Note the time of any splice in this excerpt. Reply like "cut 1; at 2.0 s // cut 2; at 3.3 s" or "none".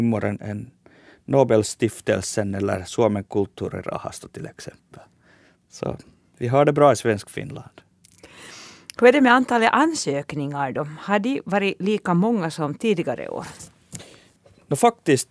none

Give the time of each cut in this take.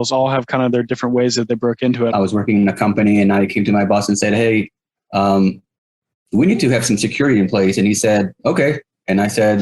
cut 1; at 2.1 s

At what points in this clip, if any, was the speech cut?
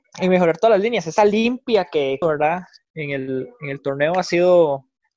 cut 1; at 2.2 s

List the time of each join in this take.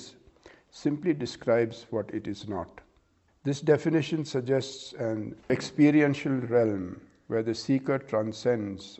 cut 1; at 3.3 s // cut 2; at 5.4 s

